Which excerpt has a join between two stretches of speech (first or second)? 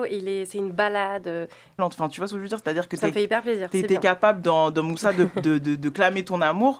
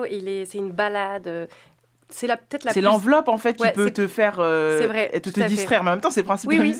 first